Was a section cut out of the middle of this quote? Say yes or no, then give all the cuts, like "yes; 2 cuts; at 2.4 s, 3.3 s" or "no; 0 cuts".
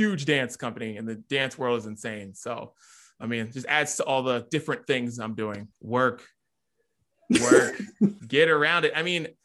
yes; 2 cuts; at 5.7 s, 8.2 s